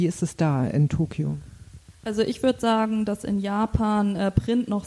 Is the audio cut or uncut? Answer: uncut